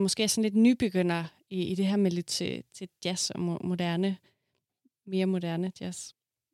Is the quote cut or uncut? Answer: uncut